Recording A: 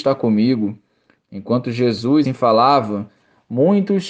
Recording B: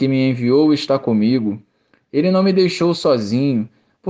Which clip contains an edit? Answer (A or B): A